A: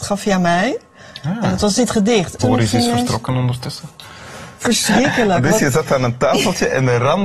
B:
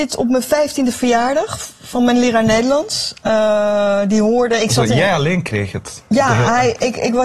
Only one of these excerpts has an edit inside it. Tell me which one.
A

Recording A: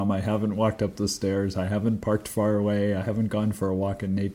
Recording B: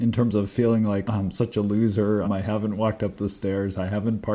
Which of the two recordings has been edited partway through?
B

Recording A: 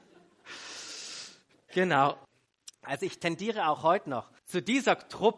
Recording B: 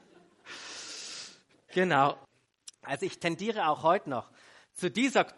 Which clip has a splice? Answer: A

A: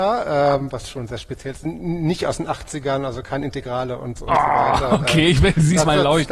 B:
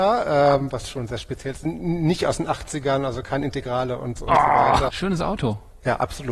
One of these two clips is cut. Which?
B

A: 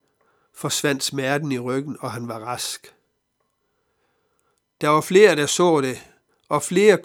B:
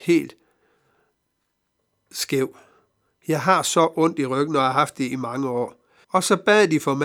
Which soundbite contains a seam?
B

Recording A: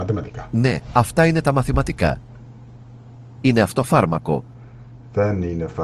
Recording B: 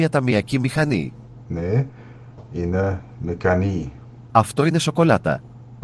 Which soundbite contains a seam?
B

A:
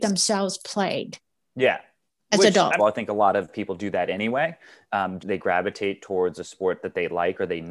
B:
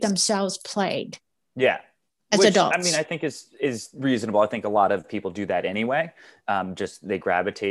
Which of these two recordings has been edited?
A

